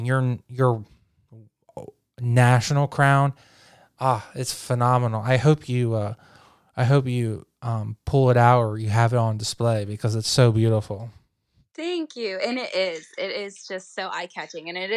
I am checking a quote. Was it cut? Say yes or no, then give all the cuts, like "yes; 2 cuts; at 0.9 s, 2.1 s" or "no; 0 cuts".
no; 0 cuts